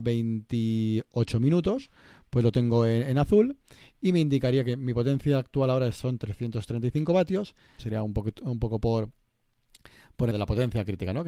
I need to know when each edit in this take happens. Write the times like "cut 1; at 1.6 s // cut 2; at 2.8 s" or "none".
cut 1; at 7.8 s // cut 2; at 10.3 s